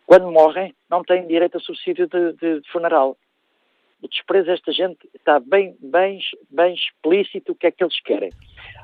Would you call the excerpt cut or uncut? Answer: cut